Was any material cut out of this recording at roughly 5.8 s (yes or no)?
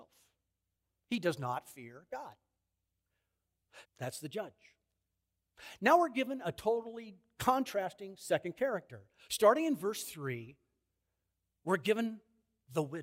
no